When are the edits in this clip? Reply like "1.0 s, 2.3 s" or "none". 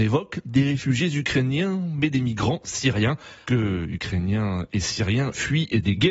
3.5 s